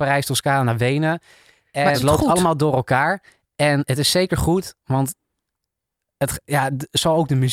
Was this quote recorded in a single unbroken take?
no; 1 cut; at 1.9 s

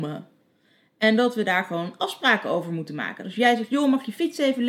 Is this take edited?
no; 0 cuts

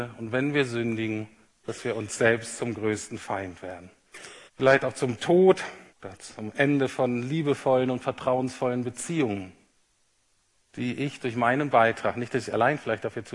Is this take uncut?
no; 2 cuts; at 4.5 s, 5.9 s

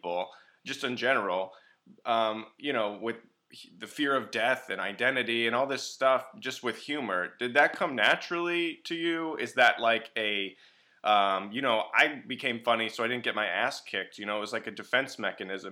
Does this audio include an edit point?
no; 0 cuts

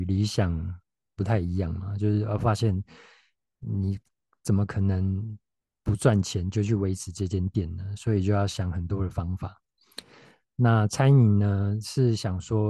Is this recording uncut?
yes; 0 cuts

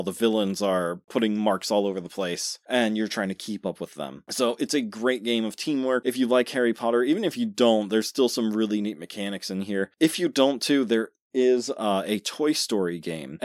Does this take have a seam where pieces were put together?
no; 0 cuts

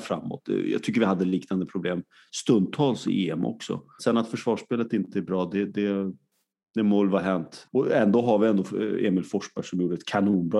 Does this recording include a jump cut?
yes; 2 cuts; at 4.0 s, 7.7 s

